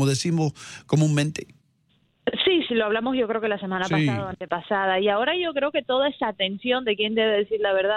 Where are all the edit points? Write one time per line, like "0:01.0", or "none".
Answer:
0:02.7